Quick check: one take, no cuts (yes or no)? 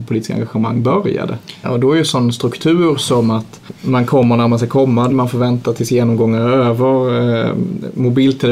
no